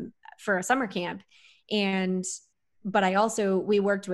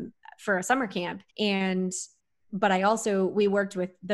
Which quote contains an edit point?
second; 1 cut; at 1.3 s

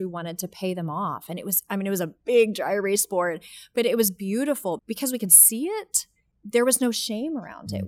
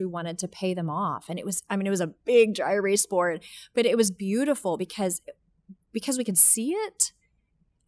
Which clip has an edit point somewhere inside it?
first; 2 cuts; at 4.8 s, 6.3 s

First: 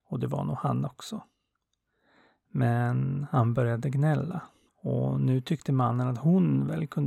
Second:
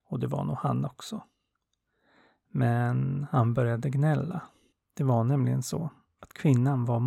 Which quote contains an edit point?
first; 1 cut; at 4.7 s

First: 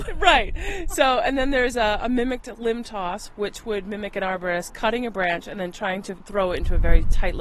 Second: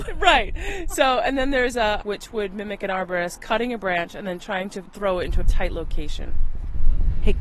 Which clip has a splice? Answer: second; 2 cuts; at 2.0 s, 5.4 s

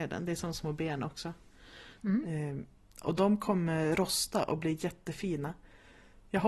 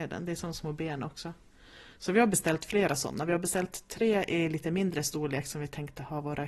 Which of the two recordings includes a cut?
first; 1 cut; at 2.0 s

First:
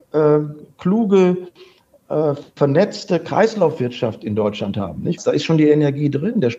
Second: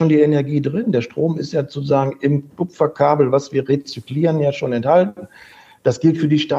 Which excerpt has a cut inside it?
first; 1 cut; at 5.2 s

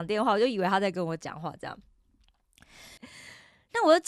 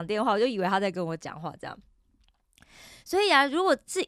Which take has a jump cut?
first; 1 cut; at 3.0 s

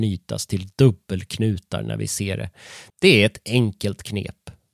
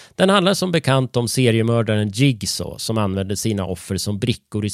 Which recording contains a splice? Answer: first; 1 cut; at 2.9 s

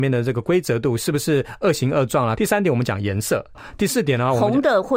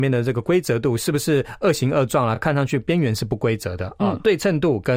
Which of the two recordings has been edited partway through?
first; 2 cuts; at 2.3 s, 3.5 s

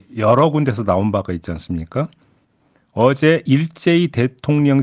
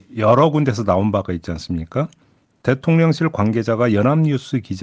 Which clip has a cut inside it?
second; 1 cut; at 2.6 s

